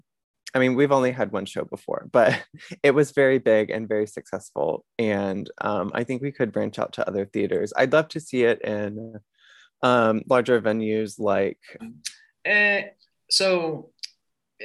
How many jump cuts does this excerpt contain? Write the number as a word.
one